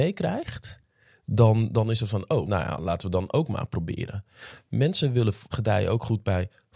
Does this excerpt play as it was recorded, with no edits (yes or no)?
no